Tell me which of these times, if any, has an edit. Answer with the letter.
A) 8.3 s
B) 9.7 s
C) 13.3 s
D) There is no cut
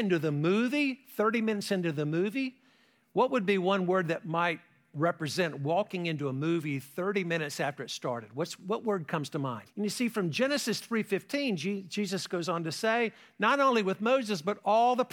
B